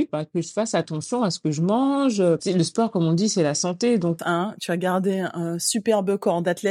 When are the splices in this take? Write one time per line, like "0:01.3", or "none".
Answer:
0:02.4
0:04.2